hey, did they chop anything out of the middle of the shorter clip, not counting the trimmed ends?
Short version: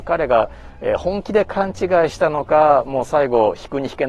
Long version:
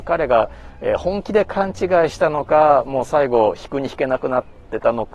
no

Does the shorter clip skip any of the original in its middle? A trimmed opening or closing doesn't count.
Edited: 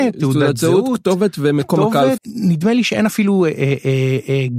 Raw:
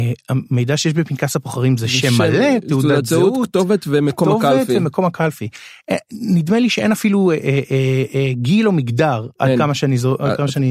yes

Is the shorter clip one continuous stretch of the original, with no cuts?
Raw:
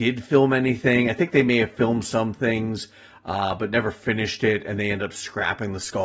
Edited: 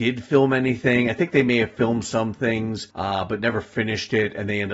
no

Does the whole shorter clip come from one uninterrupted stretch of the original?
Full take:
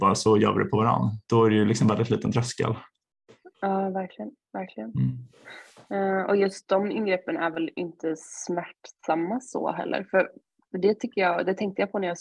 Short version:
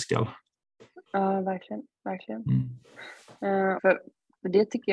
no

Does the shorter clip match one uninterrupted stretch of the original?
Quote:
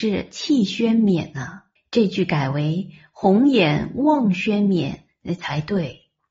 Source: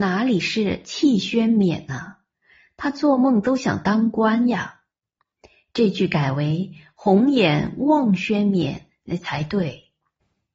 no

